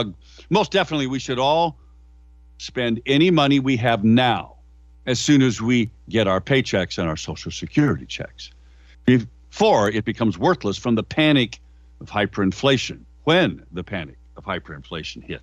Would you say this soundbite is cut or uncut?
uncut